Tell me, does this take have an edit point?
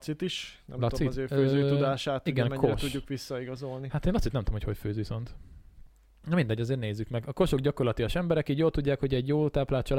no; 0 cuts

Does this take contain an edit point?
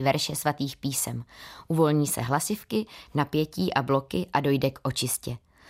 no; 0 cuts

